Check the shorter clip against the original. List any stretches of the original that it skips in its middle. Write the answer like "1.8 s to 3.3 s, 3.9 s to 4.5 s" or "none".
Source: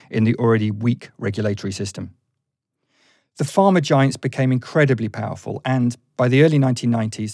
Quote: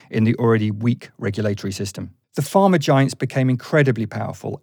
2.2 s to 3.3 s